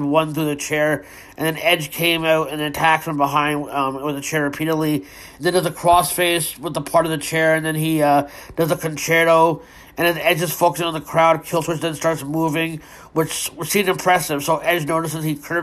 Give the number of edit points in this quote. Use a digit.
0